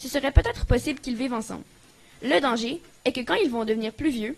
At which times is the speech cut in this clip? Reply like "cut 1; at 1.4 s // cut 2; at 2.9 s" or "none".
none